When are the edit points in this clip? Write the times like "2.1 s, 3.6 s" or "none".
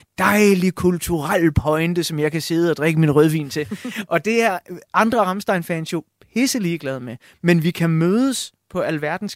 none